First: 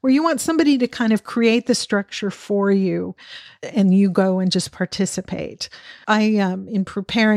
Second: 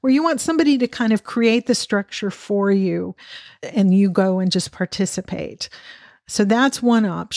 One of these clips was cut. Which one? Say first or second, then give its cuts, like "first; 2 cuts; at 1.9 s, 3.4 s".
first; 1 cut; at 6.0 s